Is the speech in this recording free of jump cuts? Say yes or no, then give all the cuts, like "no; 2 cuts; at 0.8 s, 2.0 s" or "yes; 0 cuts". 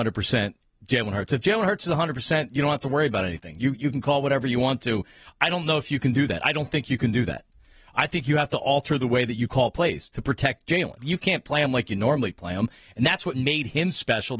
no; 1 cut; at 11.0 s